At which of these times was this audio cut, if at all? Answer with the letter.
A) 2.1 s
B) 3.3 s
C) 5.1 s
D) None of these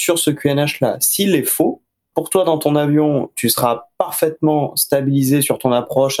A